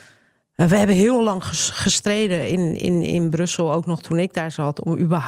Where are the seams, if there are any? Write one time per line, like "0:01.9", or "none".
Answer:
none